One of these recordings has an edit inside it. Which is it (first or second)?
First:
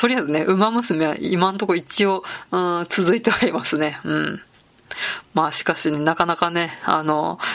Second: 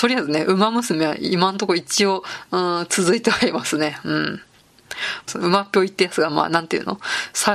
second